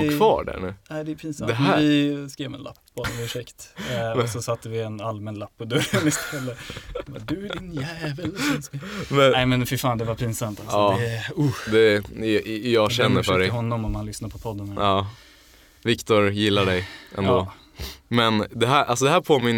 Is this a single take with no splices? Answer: yes; 0 cuts

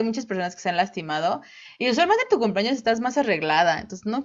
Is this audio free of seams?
yes; 0 cuts

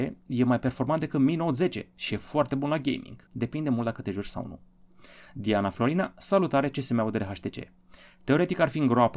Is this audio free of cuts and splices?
no; 1 cut; at 3.3 s

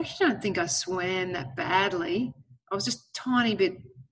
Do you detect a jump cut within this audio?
no; 0 cuts

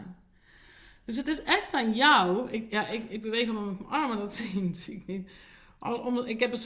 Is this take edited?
no; 0 cuts

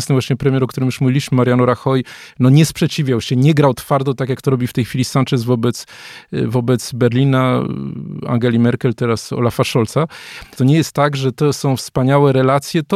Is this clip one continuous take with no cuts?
no; 1 cut; at 10.6 s

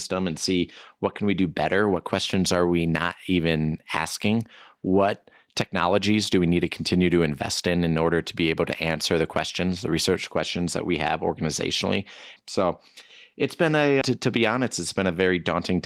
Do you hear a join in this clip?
yes; 2 cuts; at 12.4 s, 14.0 s

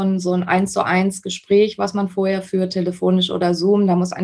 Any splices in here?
no; 0 cuts

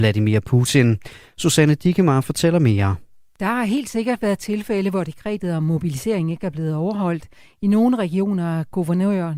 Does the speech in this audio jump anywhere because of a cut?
no; 0 cuts

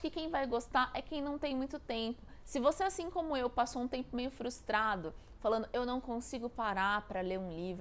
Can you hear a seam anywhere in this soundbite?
no; 0 cuts

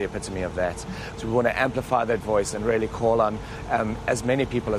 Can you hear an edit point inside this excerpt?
yes; 1 cut; at 1.2 s

